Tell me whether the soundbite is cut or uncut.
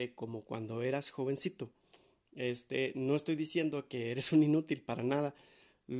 uncut